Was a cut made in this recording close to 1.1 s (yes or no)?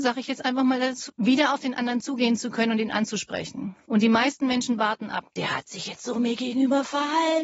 yes